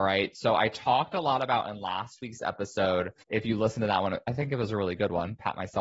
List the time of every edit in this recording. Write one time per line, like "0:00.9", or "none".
0:03.2